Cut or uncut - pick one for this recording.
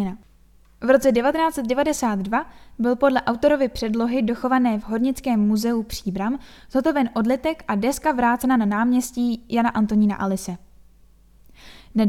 uncut